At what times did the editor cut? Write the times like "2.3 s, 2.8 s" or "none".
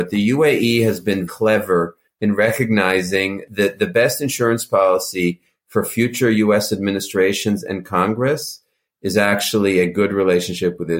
1.3 s